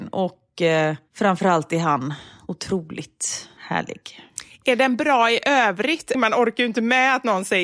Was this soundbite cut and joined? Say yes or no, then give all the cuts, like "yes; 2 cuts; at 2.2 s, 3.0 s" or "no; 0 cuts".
yes; 2 cuts; at 3.6 s, 6.1 s